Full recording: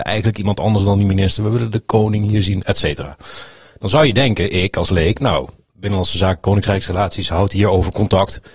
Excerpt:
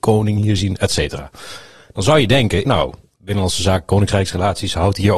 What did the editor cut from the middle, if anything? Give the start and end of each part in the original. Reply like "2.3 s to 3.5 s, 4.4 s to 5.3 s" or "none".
4.5 s to 5.2 s

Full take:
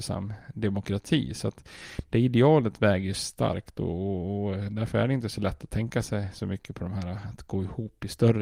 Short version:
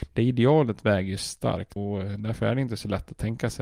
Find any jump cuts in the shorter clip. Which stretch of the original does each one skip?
3.7 s to 4.3 s

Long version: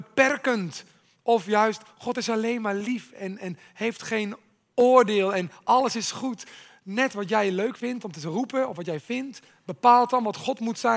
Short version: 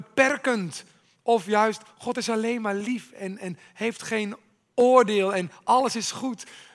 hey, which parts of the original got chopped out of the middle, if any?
none

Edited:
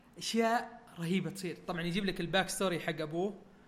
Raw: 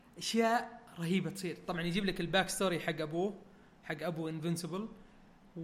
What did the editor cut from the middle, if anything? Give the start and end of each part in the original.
none

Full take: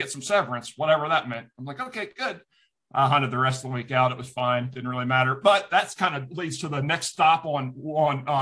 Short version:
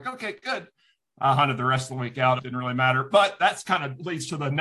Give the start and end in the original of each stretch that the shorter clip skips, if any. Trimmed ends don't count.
4.1 s to 4.7 s

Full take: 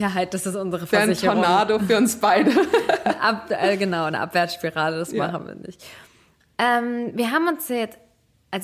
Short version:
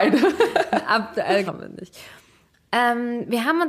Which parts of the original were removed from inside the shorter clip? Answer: 3.8 s to 5.3 s

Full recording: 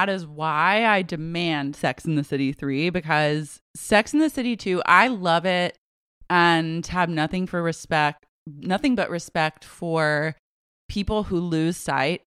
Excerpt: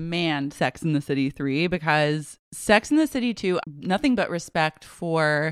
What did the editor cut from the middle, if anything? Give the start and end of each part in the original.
4.8 s to 8.4 s

